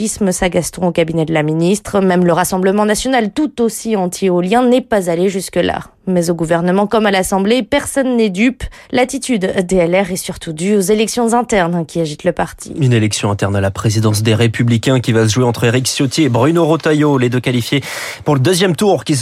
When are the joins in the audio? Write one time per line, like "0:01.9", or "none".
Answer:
none